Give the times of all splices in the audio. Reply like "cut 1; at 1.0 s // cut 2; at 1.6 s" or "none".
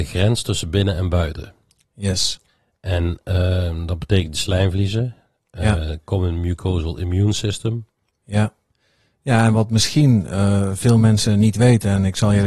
none

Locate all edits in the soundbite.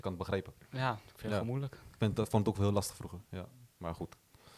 none

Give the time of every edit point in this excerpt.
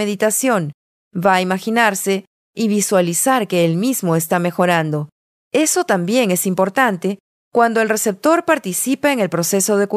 cut 1; at 5.4 s

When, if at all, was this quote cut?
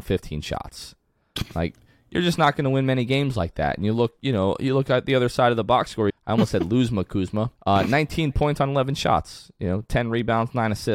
cut 1; at 6.1 s // cut 2; at 7.6 s

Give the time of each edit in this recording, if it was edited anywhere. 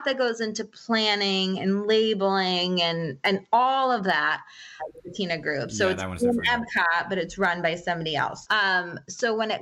cut 1; at 4.8 s // cut 2; at 8.4 s

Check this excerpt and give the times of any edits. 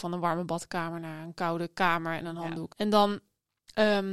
cut 1; at 2.7 s

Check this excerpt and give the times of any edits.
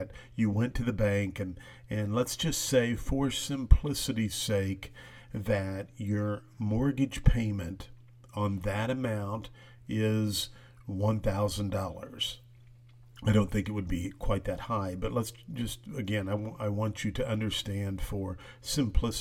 none

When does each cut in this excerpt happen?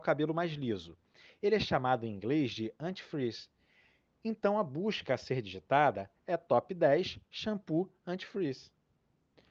none

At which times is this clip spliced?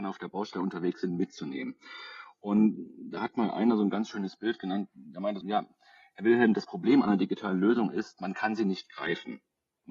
cut 1; at 5.4 s

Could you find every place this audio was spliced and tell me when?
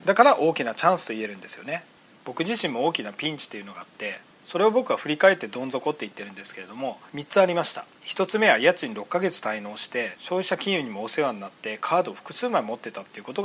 cut 1; at 7.9 s

